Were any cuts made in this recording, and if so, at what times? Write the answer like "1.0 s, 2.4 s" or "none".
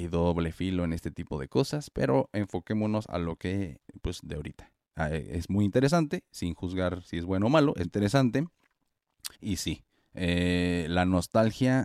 7.8 s, 9.3 s